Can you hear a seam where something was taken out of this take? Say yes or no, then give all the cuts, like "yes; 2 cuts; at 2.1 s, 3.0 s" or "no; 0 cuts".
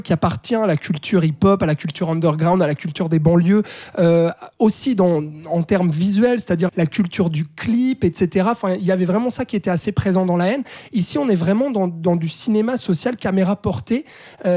yes; 1 cut; at 6.7 s